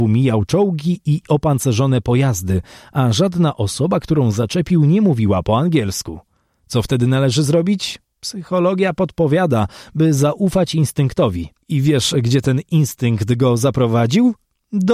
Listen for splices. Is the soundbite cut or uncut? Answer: uncut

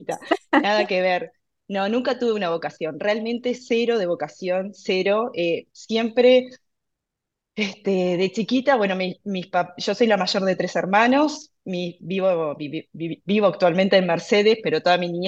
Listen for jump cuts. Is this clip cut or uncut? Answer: uncut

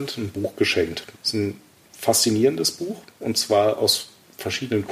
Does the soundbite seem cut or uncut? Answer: cut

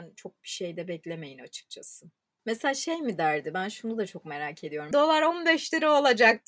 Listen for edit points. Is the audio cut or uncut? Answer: cut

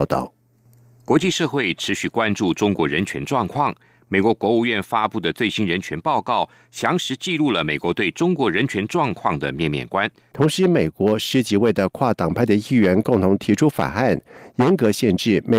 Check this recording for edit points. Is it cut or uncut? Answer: cut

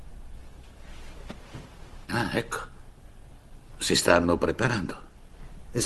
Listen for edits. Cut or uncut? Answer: cut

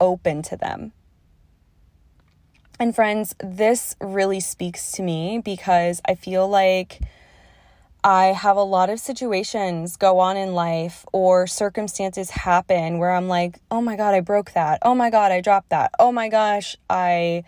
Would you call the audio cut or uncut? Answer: uncut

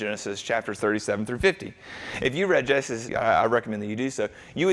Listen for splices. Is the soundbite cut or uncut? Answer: cut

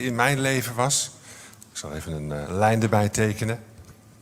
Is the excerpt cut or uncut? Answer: cut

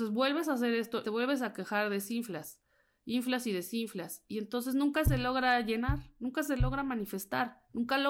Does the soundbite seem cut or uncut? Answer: cut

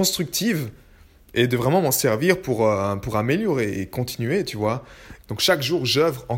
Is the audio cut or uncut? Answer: cut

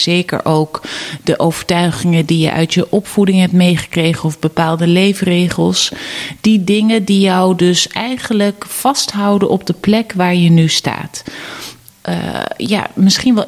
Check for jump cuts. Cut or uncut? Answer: cut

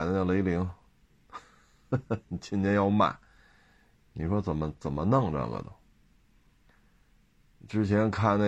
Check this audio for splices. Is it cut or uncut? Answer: uncut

